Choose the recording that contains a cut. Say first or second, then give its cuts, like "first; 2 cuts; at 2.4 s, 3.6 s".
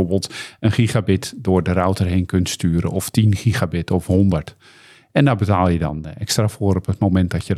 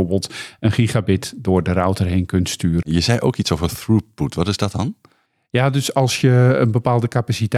second; 1 cut; at 2.8 s